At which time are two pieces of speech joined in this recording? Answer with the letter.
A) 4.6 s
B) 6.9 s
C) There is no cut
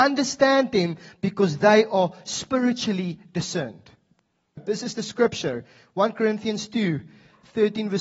A